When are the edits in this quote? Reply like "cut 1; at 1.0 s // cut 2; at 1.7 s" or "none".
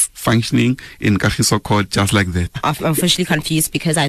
cut 1; at 2.5 s